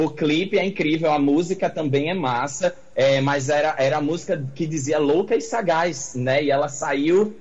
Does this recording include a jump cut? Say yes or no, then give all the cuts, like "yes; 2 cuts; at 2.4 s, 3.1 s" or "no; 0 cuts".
no; 0 cuts